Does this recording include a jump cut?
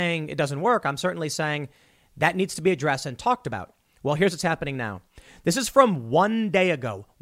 no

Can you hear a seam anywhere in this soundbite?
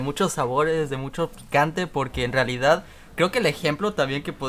no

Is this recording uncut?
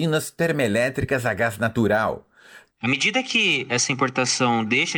no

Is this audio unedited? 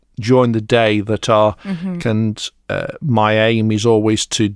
no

